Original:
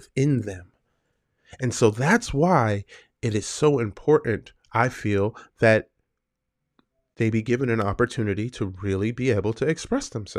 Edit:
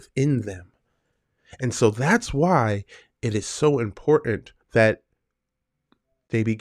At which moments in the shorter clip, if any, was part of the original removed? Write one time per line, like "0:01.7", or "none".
0:04.6